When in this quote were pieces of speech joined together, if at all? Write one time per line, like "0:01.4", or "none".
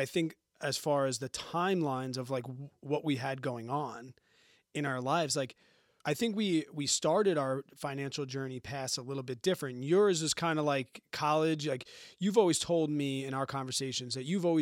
none

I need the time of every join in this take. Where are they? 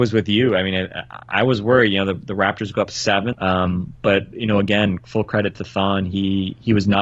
0:03.3

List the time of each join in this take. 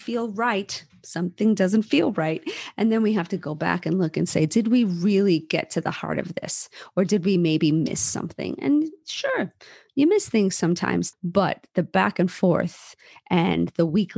0:11.1

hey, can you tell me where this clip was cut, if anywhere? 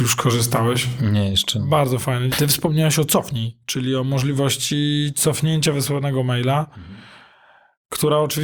0:02.3

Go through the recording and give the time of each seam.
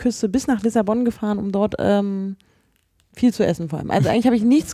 none

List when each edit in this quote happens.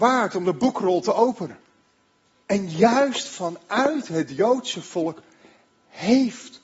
0:02.4

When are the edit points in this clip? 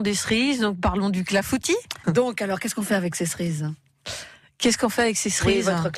0:02.0

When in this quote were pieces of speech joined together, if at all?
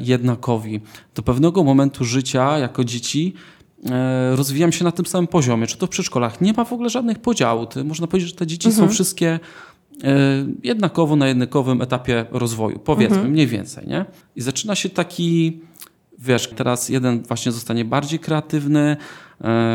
0:14.2
0:16.5

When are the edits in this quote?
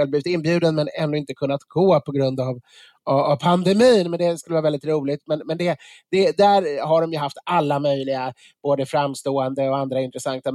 none

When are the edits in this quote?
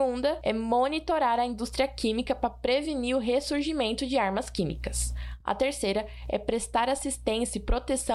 none

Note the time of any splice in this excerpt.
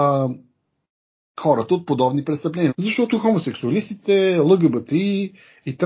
0:02.7

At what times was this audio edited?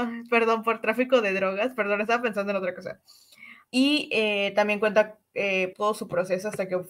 0:03.7
0:05.7

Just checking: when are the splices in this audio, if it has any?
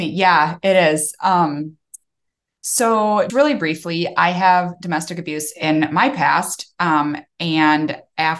0:03.3

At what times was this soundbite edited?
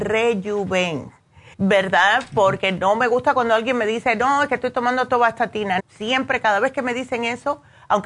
0:01.5
0:05.8

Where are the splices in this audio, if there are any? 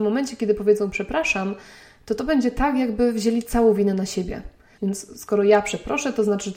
0:04.8

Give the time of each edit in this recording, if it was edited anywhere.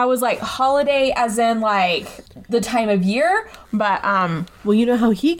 none

